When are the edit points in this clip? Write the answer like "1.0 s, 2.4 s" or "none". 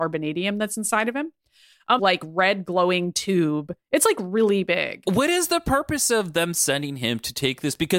2.0 s

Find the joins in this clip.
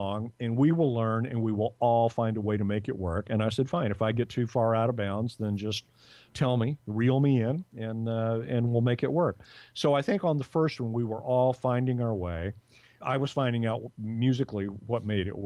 13.0 s

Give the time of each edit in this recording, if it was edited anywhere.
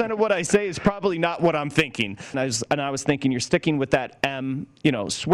2.3 s

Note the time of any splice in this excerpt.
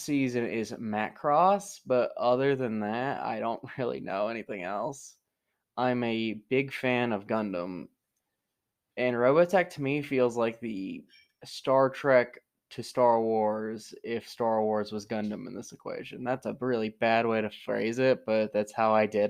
none

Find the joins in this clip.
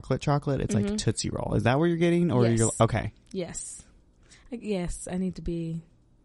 none

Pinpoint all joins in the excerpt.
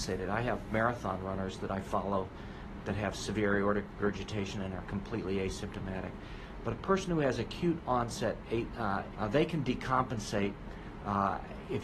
9.1 s

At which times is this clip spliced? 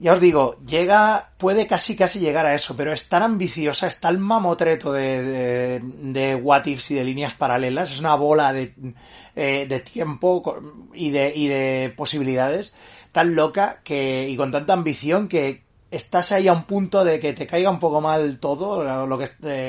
1.4 s

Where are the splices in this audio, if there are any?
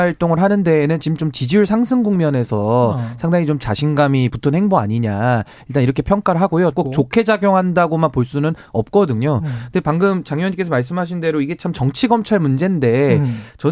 4.3 s, 6.7 s

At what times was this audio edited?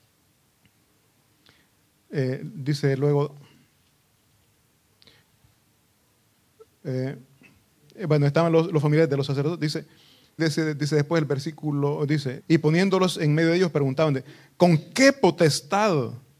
10.4 s, 12.4 s

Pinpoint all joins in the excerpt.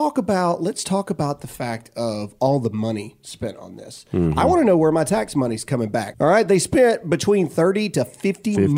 6.1 s

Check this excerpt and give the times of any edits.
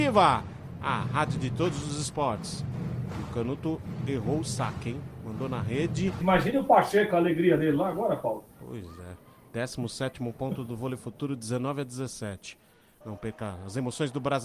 6.2 s, 13.0 s

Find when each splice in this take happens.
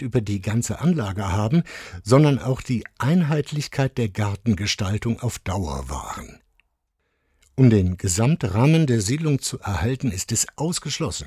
none

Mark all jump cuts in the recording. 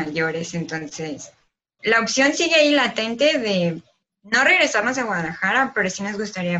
1.8 s

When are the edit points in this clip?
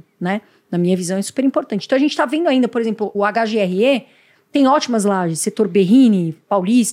3.1 s

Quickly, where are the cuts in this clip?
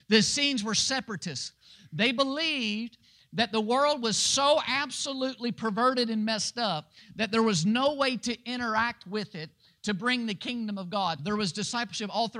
11.2 s

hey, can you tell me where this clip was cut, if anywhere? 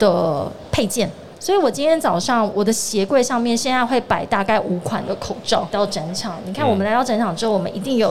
1.4 s, 5.7 s

